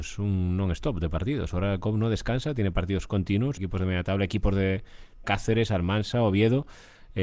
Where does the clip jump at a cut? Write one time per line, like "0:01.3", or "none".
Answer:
0:03.6
0:05.2